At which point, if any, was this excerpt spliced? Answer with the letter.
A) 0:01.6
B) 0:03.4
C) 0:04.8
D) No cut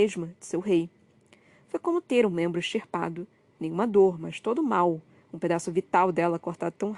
D